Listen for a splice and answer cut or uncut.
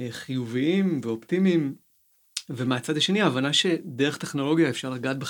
uncut